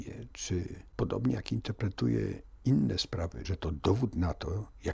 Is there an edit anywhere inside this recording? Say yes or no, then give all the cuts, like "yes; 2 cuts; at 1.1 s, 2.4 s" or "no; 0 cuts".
yes; 1 cut; at 3.4 s